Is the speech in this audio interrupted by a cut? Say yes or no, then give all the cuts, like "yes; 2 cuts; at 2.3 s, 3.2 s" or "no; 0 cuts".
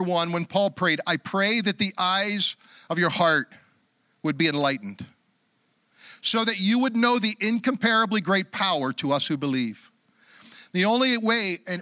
no; 0 cuts